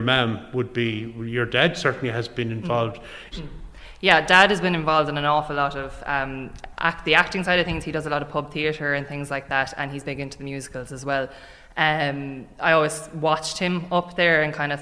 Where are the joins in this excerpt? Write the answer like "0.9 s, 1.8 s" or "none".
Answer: 3.3 s